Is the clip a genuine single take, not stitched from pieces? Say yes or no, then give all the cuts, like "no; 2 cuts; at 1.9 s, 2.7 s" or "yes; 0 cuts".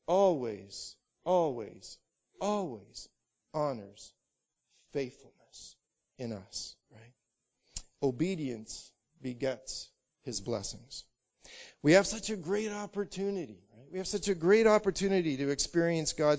yes; 0 cuts